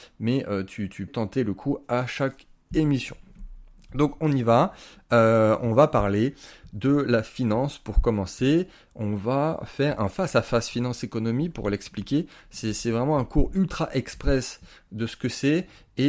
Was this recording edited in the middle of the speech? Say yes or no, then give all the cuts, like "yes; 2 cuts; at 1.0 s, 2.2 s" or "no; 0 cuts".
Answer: yes; 1 cut; at 1.1 s